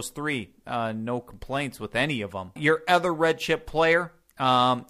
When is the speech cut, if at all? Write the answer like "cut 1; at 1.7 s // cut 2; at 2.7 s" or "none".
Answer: cut 1; at 2.6 s